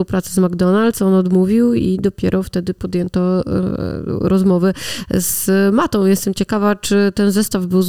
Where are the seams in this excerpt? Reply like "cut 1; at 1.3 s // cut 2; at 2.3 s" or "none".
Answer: none